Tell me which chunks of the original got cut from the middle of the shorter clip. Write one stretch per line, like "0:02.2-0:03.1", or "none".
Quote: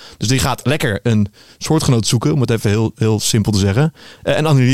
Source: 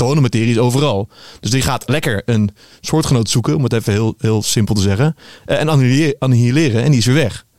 none